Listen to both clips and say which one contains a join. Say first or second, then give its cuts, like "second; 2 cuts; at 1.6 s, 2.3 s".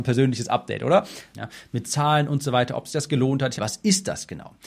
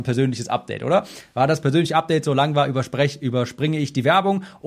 first; 2 cuts; at 1.3 s, 3.6 s